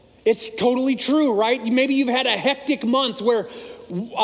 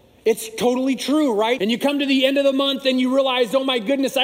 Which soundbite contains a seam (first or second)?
second